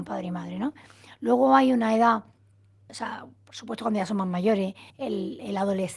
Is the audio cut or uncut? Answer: cut